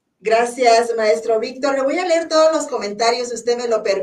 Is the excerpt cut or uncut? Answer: uncut